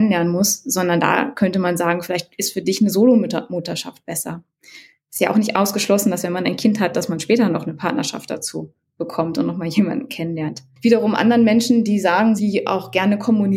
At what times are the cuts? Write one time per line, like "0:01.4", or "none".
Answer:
0:12.4